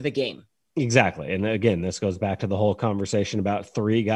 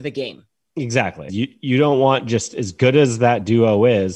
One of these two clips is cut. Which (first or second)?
second